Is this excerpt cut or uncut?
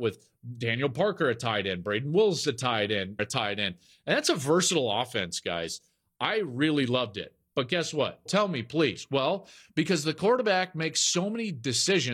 cut